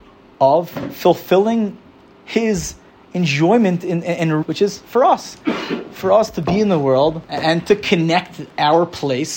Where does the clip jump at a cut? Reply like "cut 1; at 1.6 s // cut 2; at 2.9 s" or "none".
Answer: cut 1; at 4.4 s // cut 2; at 7.2 s